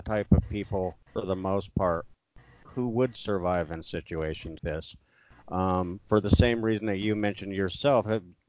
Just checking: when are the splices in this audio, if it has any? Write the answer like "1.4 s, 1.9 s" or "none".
1.0 s, 4.6 s